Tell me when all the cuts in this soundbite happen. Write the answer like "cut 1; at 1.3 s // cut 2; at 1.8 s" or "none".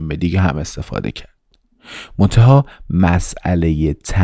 none